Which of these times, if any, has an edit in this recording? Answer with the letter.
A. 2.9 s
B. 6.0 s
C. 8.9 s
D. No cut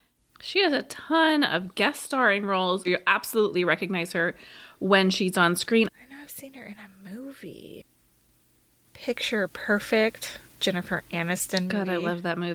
A